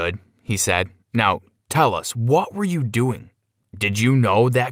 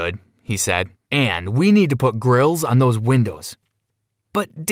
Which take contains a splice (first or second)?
second